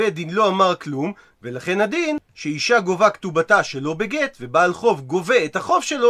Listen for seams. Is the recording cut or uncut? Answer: uncut